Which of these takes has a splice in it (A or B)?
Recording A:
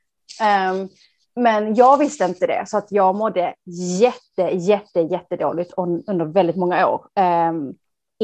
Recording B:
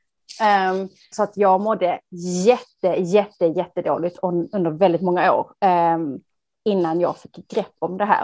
B